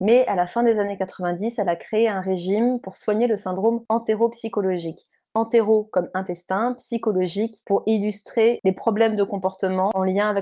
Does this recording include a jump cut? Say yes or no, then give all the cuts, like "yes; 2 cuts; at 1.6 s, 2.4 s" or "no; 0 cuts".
no; 0 cuts